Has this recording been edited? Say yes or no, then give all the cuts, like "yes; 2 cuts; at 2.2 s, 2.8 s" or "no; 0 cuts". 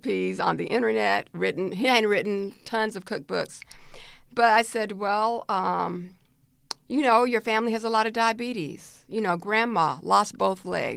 no; 0 cuts